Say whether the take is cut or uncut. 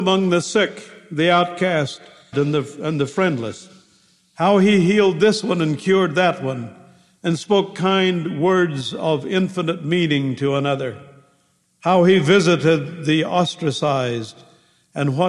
cut